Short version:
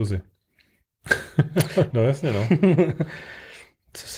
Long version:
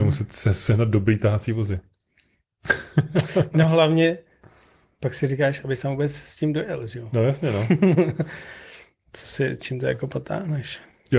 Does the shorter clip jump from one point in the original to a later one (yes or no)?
yes